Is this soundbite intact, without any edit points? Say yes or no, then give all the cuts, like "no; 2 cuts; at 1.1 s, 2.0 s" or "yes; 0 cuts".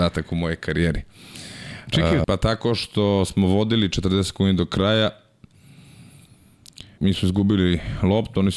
no; 2 cuts; at 2.2 s, 7.0 s